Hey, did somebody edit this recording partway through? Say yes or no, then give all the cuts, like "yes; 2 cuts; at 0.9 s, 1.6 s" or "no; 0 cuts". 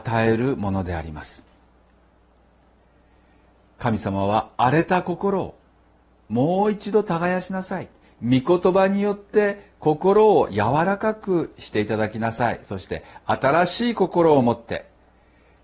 no; 0 cuts